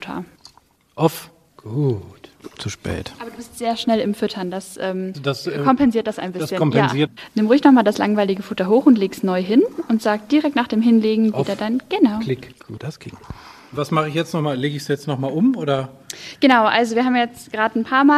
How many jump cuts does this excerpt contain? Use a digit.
3